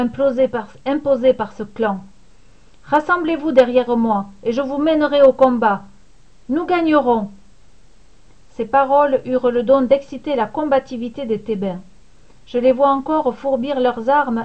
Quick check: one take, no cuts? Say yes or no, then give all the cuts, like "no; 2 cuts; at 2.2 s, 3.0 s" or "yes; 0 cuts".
yes; 0 cuts